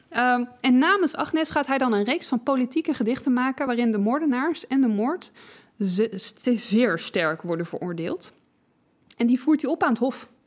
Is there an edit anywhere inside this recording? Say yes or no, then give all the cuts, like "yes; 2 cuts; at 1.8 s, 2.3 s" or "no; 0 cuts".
no; 0 cuts